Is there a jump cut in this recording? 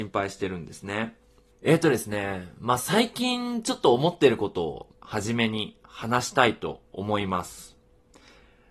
yes; 2 cuts; at 1.5 s, 4.9 s

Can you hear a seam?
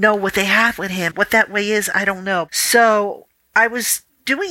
yes; 2 cuts; at 1.1 s, 2.5 s

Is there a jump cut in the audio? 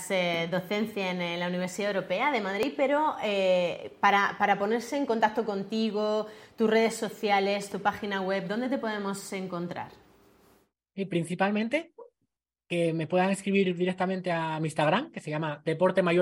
no; 0 cuts

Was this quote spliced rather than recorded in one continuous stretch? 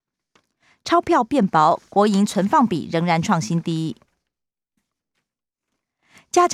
no; 0 cuts

